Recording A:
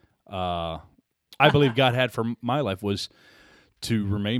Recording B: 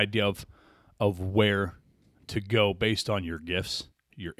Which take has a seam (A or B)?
A